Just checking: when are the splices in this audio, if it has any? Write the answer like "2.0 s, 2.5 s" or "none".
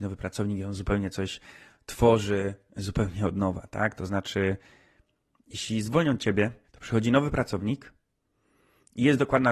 4.0 s, 6.6 s